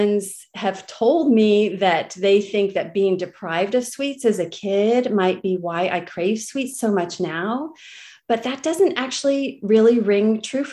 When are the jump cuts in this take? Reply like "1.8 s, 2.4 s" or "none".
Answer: none